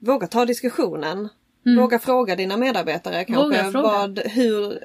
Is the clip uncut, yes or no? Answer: yes